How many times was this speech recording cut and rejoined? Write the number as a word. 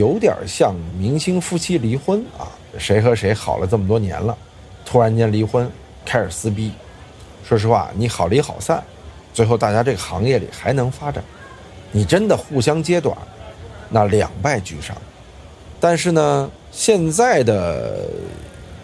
one